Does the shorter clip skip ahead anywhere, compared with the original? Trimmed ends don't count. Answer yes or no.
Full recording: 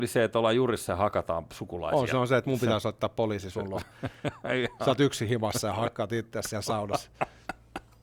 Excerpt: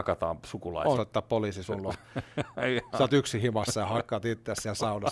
yes